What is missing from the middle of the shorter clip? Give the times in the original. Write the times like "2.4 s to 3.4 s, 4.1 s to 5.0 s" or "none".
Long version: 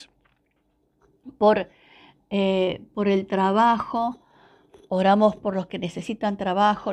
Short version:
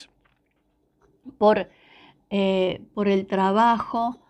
none